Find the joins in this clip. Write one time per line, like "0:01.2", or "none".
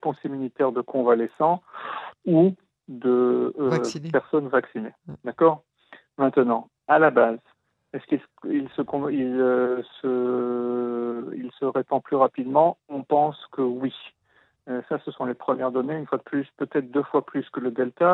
none